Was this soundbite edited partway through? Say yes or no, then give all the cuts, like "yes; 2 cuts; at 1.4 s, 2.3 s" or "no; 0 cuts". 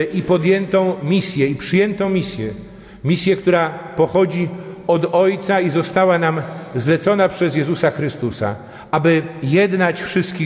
no; 0 cuts